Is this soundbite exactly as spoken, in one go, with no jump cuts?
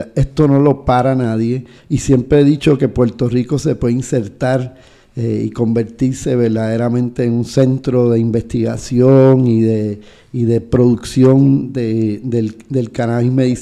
no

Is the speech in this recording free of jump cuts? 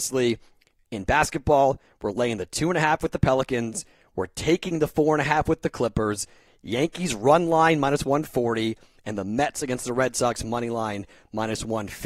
yes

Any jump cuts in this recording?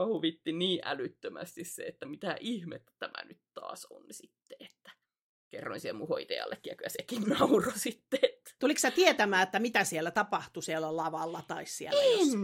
no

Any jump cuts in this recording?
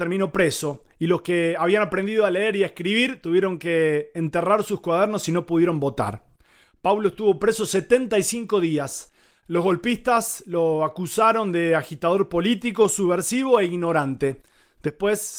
no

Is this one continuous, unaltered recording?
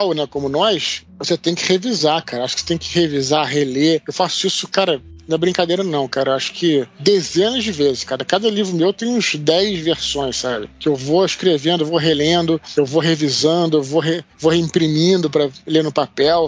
yes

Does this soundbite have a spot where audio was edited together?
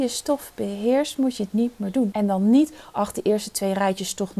yes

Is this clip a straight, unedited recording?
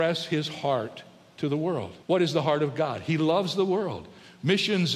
no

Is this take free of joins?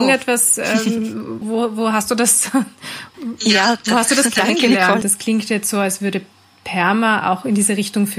no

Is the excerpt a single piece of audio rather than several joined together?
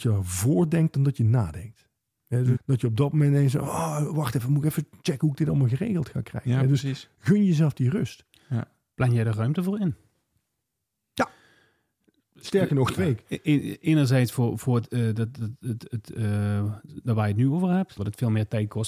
no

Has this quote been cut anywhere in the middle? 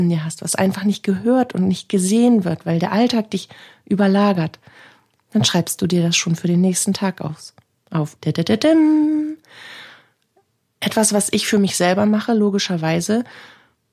yes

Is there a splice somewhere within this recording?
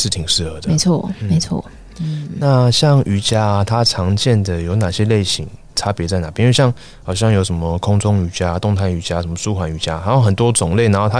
no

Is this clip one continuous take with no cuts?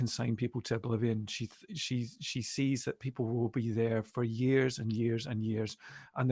yes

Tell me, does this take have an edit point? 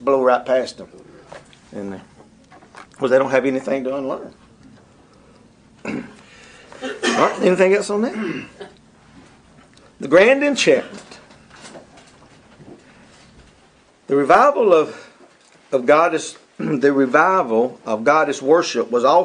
no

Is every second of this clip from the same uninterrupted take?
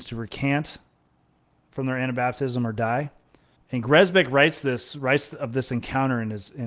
no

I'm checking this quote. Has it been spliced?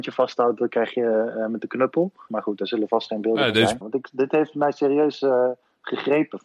yes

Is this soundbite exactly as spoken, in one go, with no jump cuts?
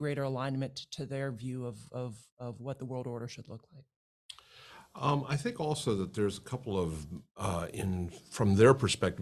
yes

